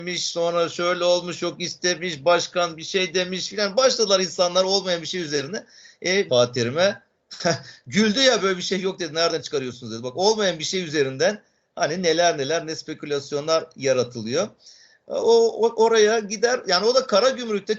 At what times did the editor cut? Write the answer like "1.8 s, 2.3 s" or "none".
6.3 s

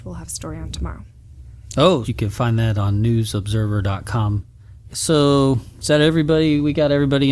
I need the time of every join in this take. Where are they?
2.1 s, 4.9 s

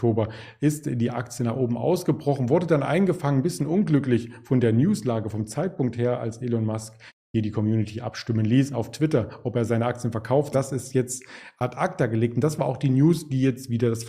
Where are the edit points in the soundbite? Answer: 10.5 s

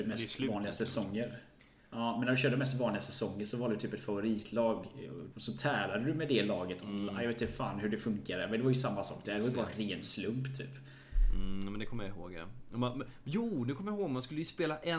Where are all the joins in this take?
5.3 s

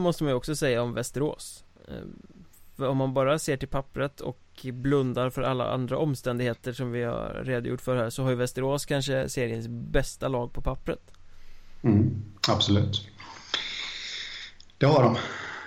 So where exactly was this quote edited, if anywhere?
none

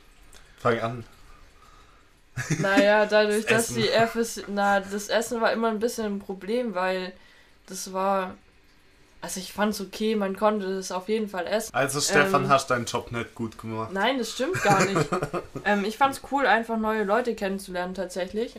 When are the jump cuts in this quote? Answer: 11.7 s

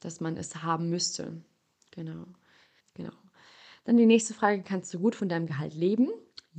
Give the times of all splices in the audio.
2.8 s

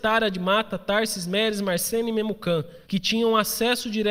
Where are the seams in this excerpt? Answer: 2.8 s

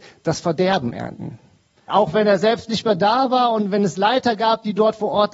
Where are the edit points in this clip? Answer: 1.9 s

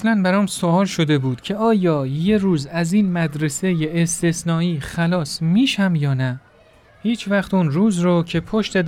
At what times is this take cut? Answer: 6.9 s

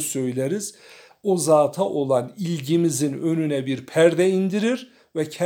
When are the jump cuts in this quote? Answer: none

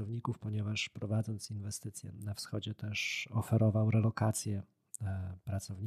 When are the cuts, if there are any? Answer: 2.1 s

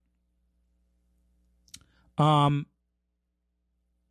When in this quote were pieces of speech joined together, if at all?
none

